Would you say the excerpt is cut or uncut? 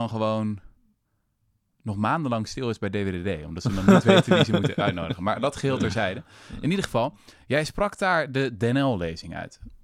uncut